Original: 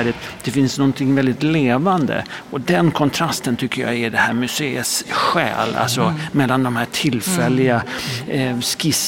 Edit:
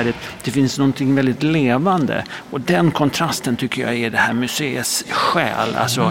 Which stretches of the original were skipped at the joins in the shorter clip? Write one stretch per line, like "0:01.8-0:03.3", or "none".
none

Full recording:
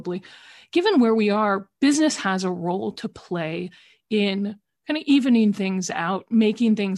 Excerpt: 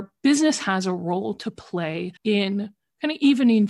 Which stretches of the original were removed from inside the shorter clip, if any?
0:03.7-0:04.0

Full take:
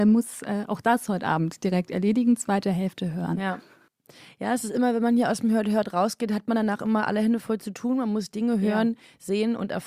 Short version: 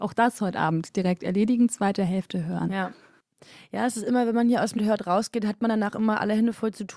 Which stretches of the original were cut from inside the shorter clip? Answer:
0:05.4-0:05.6

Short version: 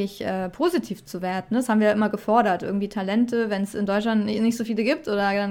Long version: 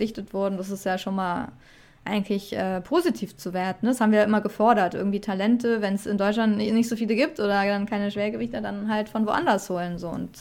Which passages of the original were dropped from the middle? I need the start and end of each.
none

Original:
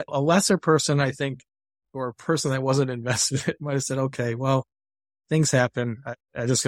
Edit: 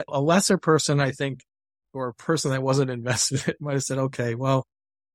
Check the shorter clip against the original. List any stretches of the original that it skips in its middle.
none

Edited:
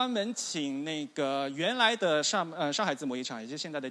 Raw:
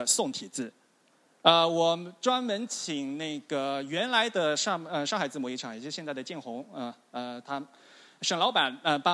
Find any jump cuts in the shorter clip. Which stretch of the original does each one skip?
none

